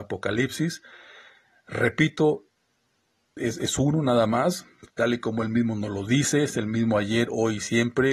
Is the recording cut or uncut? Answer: cut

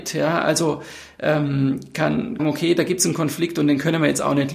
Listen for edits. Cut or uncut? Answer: cut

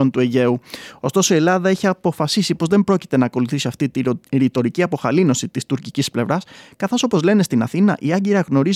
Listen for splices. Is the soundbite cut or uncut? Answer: uncut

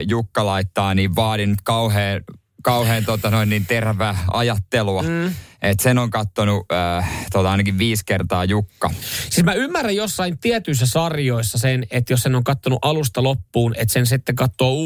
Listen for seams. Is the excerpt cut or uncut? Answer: uncut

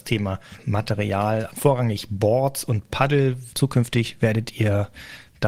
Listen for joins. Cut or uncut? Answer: cut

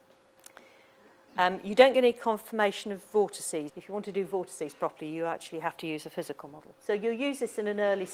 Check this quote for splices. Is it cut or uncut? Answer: cut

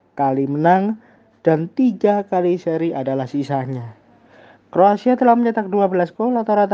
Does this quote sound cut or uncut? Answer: uncut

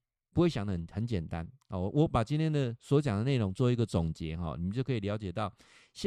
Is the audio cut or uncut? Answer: uncut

